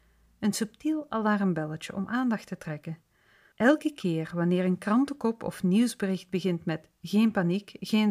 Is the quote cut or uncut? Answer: cut